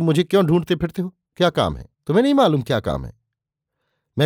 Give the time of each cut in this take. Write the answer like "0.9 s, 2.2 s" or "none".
1.9 s